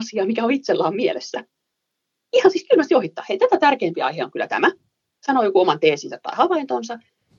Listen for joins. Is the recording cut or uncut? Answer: uncut